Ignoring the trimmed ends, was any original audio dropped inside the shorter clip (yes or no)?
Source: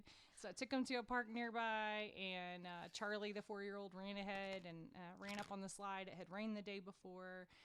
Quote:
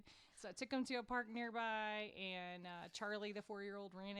no